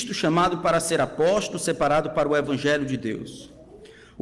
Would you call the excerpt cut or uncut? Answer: uncut